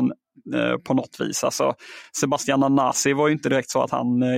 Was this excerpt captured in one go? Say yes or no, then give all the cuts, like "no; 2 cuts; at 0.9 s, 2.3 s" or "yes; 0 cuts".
yes; 0 cuts